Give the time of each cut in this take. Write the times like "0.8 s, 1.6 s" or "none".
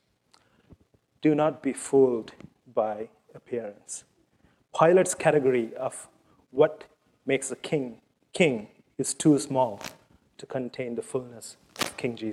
none